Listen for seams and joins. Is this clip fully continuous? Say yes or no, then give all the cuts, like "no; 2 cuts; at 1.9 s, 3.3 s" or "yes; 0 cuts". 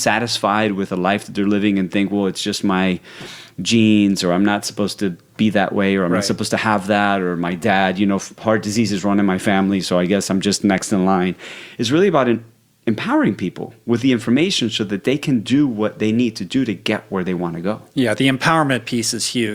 yes; 0 cuts